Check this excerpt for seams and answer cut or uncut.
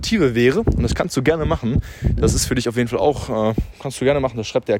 uncut